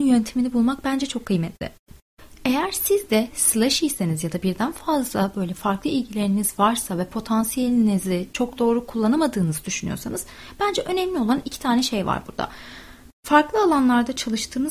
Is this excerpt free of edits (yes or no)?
yes